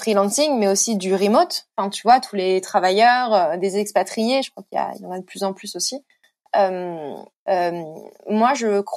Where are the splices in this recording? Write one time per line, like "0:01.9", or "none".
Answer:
0:07.3